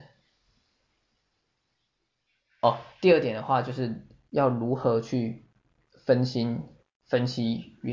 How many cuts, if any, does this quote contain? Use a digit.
0